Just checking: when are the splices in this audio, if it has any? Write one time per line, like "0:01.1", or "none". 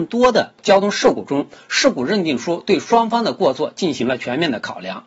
none

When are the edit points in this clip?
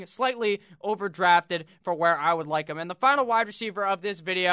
none

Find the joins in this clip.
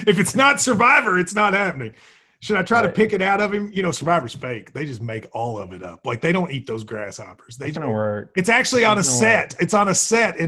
0:07.7

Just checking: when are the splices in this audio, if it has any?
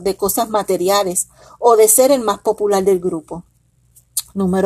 none

